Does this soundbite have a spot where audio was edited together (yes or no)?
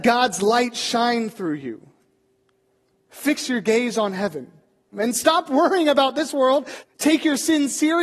yes